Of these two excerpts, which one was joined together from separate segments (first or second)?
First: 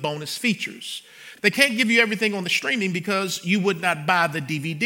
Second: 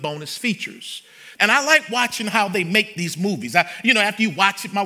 second